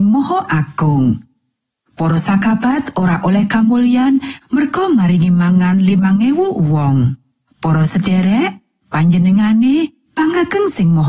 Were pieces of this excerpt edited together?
yes; 1 cut; at 7.5 s

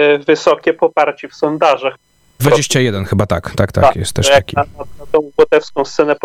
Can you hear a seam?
yes; 2 cuts; at 2.4 s, 3.7 s

